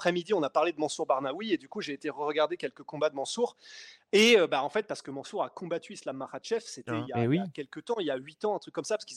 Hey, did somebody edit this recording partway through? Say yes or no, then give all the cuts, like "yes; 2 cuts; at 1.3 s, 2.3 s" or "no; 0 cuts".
no; 0 cuts